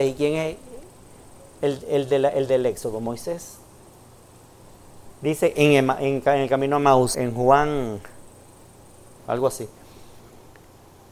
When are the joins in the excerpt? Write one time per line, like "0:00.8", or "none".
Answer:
0:05.2
0:07.1
0:09.2